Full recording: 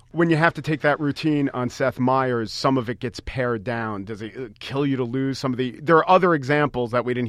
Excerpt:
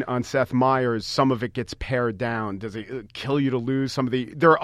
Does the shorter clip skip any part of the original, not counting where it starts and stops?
no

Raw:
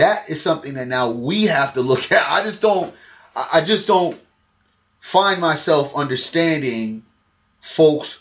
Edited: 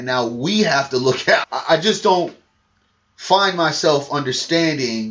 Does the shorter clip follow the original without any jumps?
no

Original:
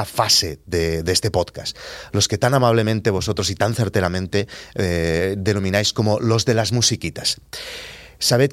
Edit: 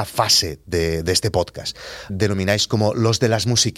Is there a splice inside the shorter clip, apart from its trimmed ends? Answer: yes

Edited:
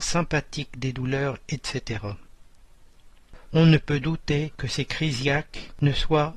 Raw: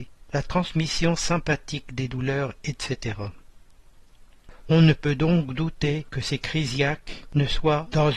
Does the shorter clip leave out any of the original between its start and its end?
yes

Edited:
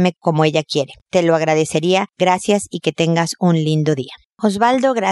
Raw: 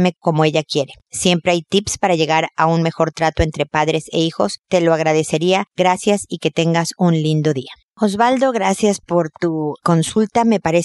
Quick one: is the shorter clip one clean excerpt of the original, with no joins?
no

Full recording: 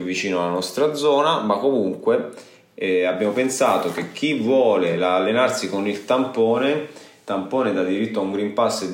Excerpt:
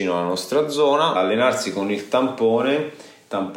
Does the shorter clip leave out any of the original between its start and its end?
yes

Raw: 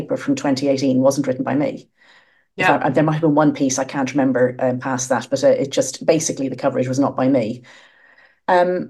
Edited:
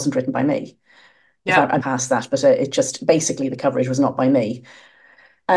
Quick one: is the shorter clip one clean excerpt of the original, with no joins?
no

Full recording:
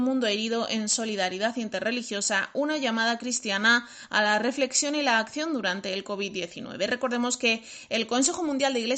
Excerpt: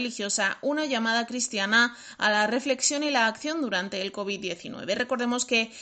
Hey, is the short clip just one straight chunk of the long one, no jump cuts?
yes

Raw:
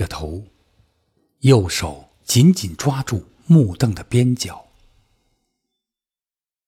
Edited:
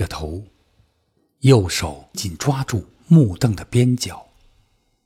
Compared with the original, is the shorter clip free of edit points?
no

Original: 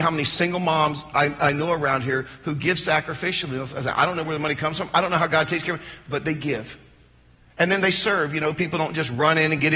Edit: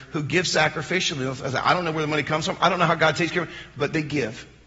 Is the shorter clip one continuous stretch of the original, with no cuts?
yes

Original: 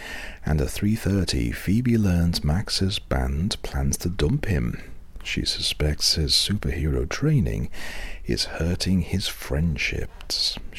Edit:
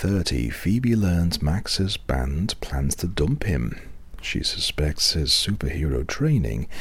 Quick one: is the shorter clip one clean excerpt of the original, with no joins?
yes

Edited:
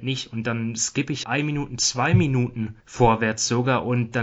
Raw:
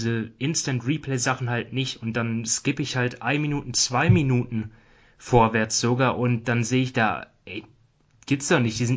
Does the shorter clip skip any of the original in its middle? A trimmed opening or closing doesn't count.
yes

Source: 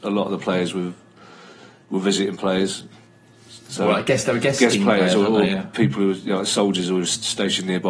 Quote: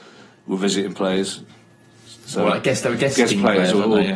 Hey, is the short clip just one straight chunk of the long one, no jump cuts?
yes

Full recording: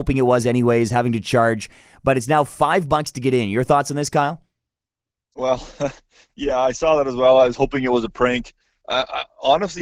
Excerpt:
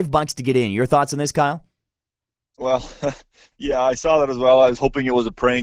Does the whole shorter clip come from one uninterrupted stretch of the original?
yes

